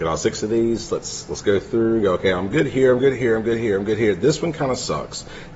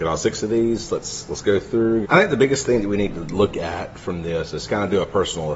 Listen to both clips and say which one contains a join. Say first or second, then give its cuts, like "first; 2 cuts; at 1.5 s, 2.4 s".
second; 1 cut; at 2.0 s